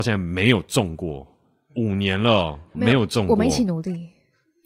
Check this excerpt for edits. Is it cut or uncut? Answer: cut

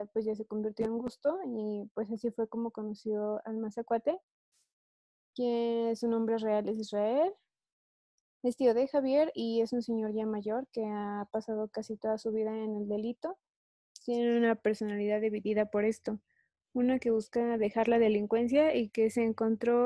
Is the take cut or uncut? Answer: uncut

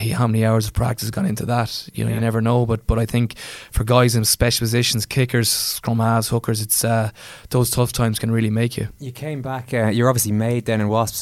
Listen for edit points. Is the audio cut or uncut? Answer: uncut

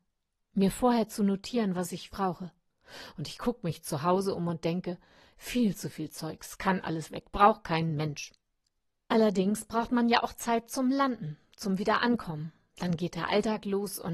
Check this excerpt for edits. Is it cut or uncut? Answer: cut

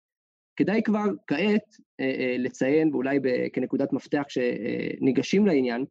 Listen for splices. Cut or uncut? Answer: uncut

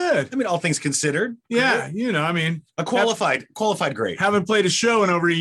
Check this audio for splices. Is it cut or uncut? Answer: uncut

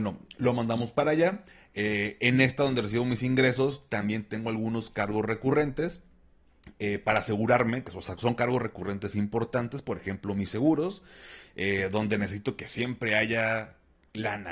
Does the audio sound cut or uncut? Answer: uncut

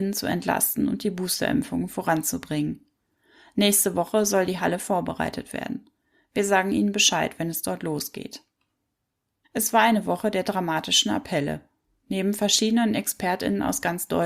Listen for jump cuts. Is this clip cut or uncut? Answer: cut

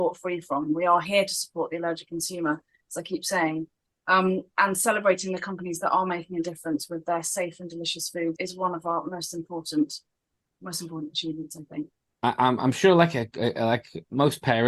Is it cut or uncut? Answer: cut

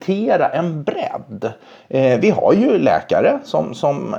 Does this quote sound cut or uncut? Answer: uncut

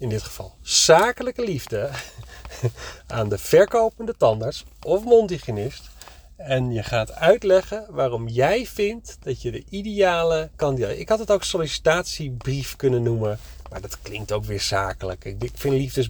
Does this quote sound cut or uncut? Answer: uncut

